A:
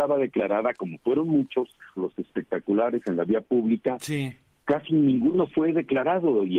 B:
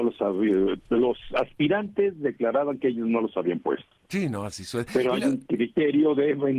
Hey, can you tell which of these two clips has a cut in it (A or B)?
A